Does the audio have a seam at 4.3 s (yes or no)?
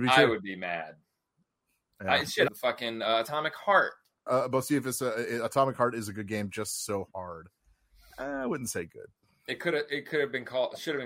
yes